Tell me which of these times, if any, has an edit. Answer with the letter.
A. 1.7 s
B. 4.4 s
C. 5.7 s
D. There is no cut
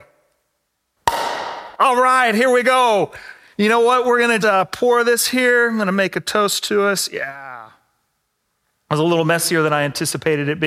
B